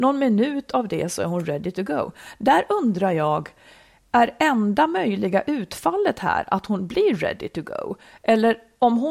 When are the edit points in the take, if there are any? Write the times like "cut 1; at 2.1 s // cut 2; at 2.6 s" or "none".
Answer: none